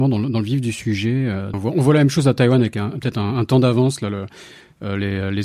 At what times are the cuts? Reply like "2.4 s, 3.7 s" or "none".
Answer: 1.5 s